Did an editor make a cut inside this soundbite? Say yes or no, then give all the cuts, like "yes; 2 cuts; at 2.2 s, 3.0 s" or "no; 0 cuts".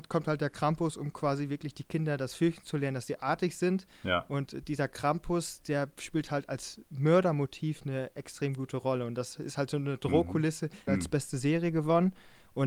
yes; 1 cut; at 10.9 s